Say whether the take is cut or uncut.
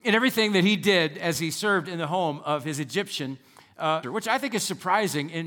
cut